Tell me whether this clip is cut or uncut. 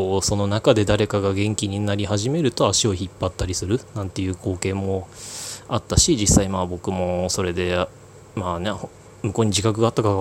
uncut